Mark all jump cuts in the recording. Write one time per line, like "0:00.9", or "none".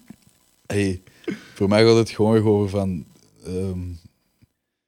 none